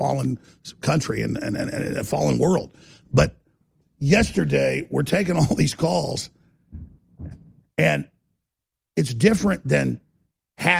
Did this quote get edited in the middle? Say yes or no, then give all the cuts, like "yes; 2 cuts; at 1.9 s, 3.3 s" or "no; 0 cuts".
no; 0 cuts